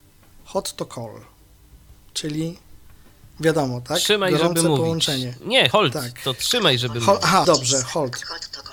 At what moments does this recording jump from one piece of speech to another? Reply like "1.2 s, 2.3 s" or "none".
5.7 s, 7.4 s